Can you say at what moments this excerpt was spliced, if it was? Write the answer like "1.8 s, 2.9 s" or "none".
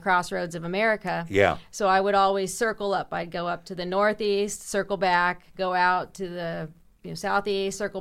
none